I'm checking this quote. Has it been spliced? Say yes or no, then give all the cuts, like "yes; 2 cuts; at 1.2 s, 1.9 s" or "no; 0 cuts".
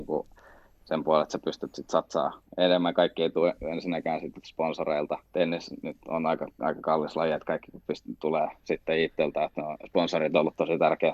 no; 0 cuts